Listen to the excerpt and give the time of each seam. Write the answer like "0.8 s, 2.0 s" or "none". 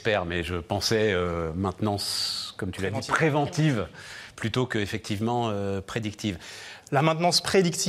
6.8 s